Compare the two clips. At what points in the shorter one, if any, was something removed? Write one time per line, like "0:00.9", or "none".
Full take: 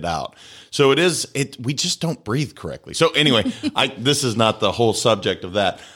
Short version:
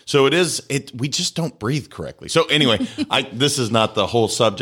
none